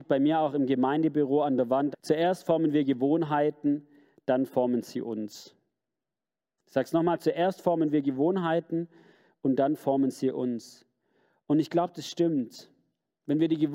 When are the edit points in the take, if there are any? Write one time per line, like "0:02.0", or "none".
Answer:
0:01.9